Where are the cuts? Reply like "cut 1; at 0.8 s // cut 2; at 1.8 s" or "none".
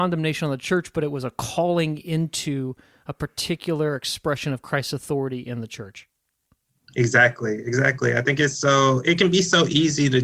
none